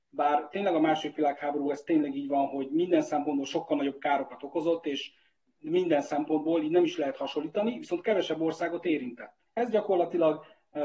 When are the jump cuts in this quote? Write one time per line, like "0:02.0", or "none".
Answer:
0:09.5